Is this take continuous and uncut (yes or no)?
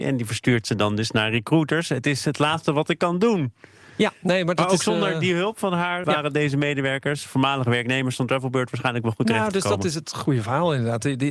no